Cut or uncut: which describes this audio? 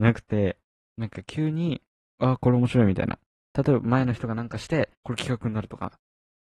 cut